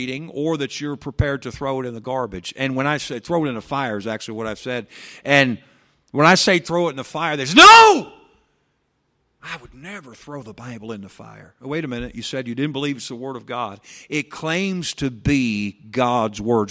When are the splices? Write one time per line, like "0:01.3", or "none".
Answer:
none